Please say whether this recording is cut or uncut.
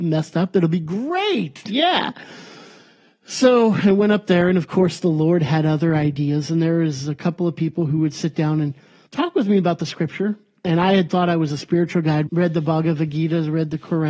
cut